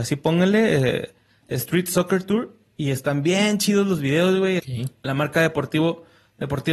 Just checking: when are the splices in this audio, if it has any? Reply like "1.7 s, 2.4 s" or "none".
4.6 s